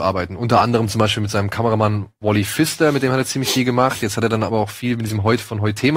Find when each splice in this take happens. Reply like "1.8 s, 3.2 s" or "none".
none